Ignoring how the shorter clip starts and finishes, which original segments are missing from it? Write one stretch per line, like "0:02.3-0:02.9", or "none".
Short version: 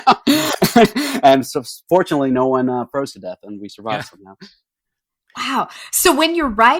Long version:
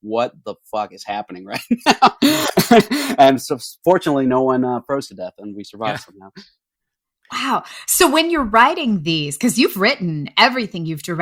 none